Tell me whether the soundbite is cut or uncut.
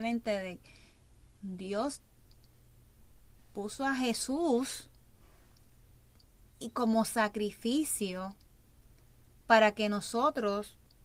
uncut